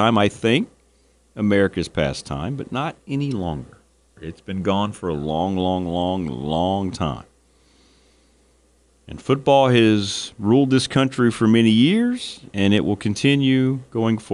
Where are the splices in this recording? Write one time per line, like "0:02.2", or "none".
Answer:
0:04.2